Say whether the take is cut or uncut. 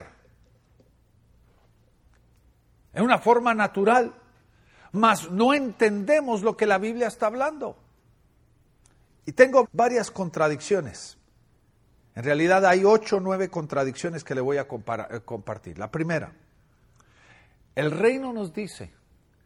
cut